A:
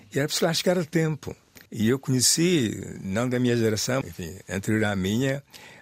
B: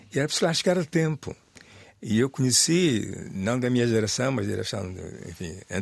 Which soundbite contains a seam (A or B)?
A